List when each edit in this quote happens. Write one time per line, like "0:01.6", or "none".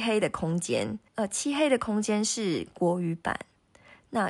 0:01.1